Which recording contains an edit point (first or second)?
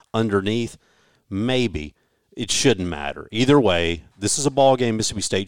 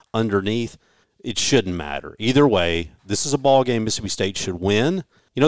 second